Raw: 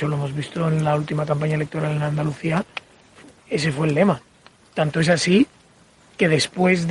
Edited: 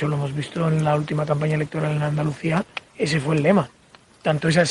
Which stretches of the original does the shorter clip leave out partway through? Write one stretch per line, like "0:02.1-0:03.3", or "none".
0:02.9-0:03.4

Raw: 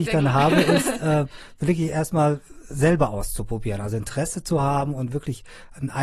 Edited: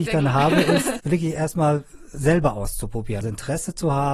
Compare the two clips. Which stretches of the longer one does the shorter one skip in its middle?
0:01.0-0:01.6
0:03.8-0:03.9

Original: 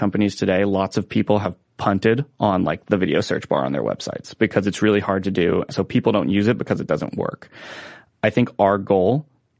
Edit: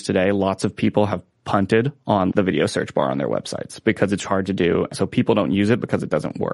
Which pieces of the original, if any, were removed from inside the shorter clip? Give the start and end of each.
0:02.6-0:02.8
0:04.8-0:05.0

